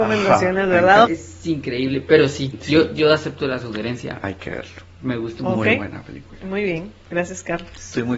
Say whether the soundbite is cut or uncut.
cut